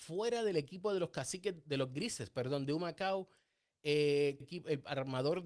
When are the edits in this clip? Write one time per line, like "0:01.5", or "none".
0:04.4